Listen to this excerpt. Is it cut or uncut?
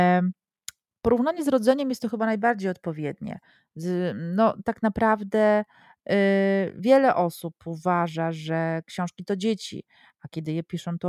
uncut